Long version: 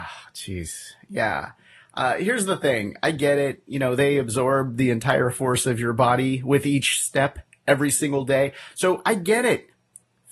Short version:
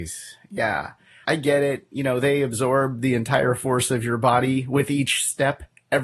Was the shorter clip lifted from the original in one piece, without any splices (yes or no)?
no